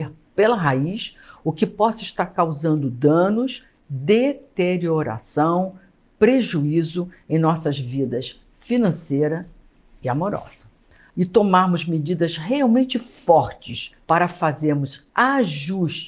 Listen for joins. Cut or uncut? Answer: cut